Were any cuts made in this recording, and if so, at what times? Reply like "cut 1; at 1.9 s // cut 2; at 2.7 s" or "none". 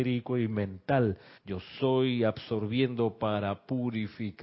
cut 1; at 1.4 s